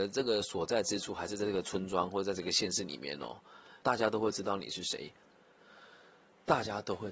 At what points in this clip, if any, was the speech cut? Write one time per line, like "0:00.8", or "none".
0:03.8